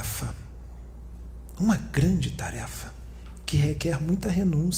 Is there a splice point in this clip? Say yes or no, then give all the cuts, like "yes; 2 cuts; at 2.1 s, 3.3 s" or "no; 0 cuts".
no; 0 cuts